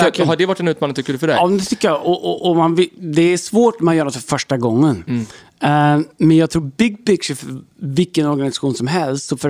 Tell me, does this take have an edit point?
no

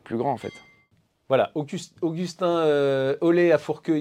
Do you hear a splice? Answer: no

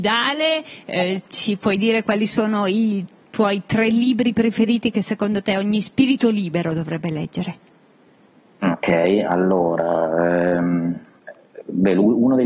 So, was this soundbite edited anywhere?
no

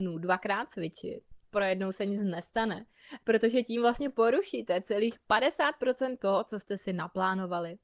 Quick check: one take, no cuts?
no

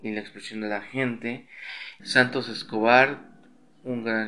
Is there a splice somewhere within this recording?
yes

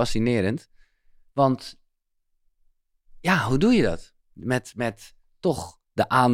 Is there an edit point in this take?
no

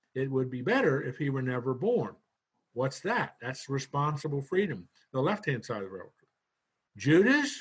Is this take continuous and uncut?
yes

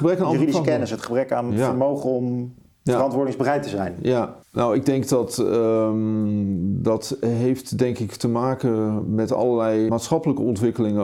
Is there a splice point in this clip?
yes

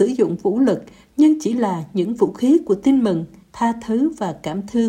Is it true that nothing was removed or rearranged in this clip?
no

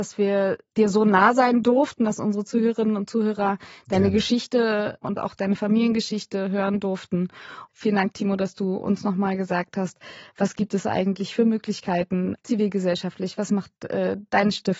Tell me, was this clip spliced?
yes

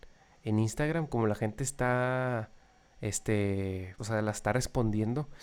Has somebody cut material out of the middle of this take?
yes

